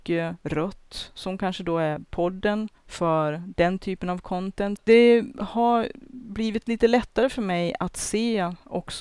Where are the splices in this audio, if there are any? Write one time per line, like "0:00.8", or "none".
0:02.8
0:04.8